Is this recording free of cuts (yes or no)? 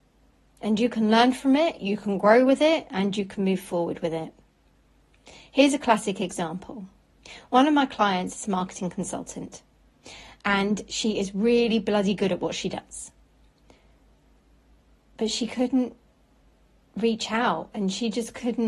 yes